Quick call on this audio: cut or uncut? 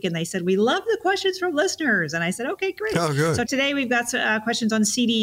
cut